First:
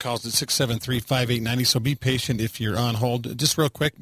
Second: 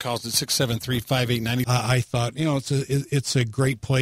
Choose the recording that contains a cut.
second; 1 cut; at 1.6 s

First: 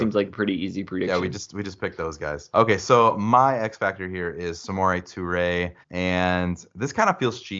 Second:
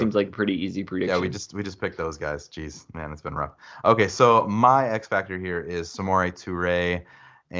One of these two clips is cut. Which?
first; 2 cuts; at 2.5 s, 5.8 s

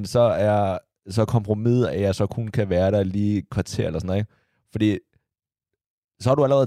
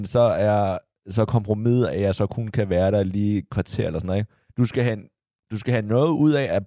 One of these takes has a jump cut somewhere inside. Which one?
second; 1 cut; at 4.5 s

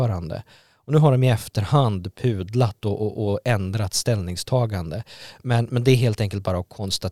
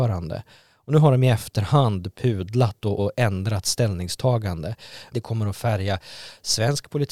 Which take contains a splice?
second; 2 cuts; at 3.0 s, 5.1 s

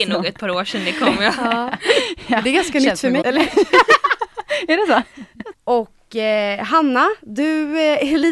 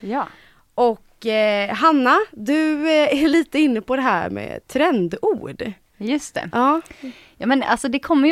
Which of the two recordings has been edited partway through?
first; 2 cuts; at 3.2 s, 5.5 s

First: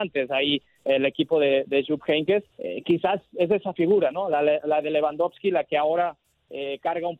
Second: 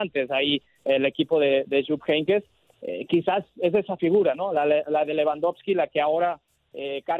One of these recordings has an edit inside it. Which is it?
first; 1 cut; at 2.5 s

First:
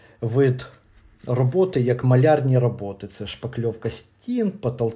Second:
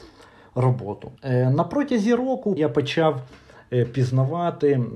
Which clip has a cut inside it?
second; 2 cuts; at 1.2 s, 2.6 s

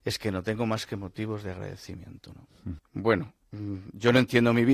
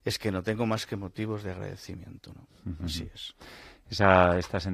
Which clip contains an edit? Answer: first; 1 cut; at 2.8 s

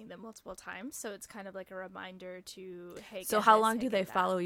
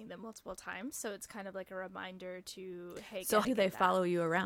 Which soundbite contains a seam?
second; 1 cut; at 3.4 s

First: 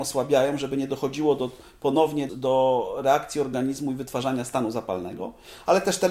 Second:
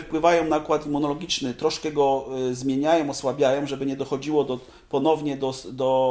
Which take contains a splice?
first; 1 cut; at 2.3 s

